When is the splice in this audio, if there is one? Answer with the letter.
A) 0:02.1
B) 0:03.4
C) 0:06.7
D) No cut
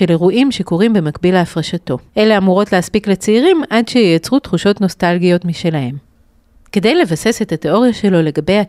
A